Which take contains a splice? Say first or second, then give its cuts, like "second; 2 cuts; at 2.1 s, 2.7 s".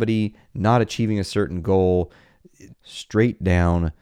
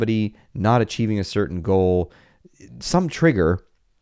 first; 1 cut; at 2.7 s